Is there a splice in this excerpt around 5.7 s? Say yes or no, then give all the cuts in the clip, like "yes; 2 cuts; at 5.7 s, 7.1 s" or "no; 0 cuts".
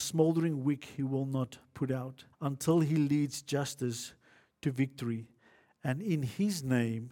no; 1 cut; at 2.3 s